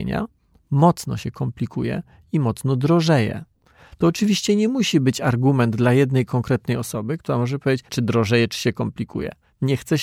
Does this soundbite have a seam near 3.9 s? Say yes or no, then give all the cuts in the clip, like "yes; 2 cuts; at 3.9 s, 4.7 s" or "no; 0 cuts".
no; 1 cut; at 7.9 s